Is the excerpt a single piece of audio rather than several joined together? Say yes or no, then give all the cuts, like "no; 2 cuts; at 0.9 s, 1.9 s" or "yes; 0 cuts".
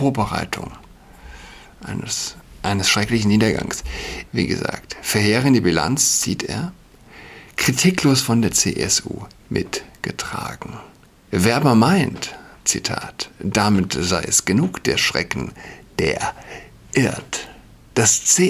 no; 1 cut; at 4.3 s